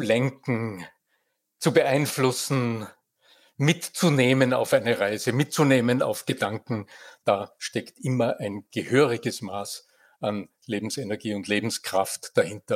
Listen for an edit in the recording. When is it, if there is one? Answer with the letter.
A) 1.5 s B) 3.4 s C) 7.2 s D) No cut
D